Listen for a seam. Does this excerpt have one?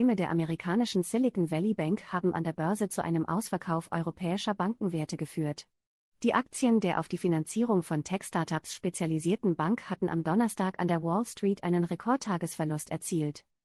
no; 0 cuts

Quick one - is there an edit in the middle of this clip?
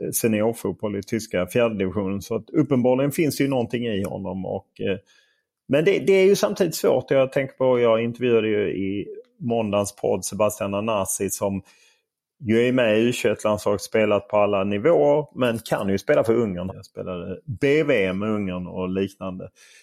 yes; 1 cut; at 16.7 s

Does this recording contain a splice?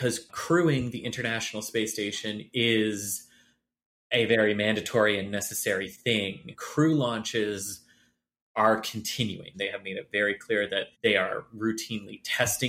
yes; 2 cuts; at 9.5 s, 10.9 s

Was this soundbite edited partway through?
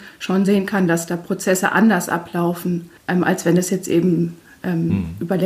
yes; 1 cut; at 3.0 s

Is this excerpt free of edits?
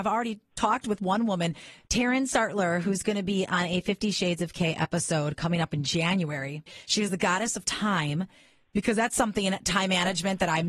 yes; 0 cuts

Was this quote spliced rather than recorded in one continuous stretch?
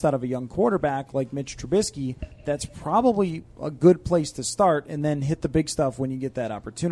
no; 0 cuts

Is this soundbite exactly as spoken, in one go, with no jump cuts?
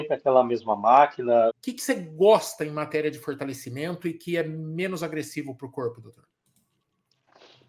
no; 1 cut; at 1.5 s

